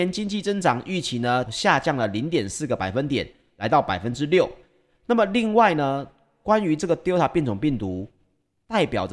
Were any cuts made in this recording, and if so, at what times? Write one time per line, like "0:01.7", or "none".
0:01.4

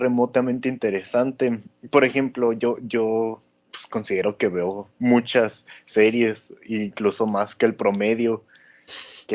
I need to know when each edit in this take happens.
none

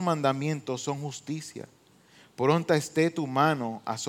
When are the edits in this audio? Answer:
none

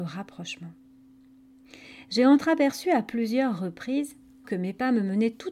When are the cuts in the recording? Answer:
0:04.4

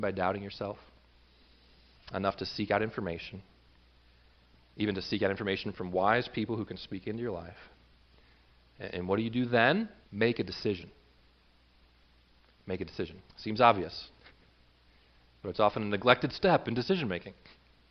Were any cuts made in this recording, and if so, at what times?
0:10.0
0:13.3

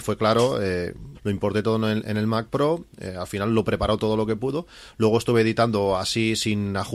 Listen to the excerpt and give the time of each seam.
0:01.1
0:02.9

